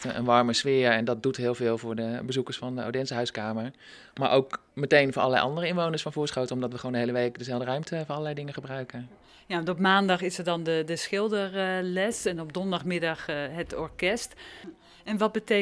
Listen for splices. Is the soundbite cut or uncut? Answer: uncut